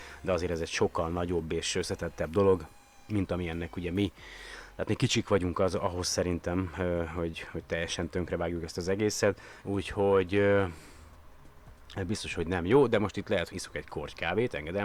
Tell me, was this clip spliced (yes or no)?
yes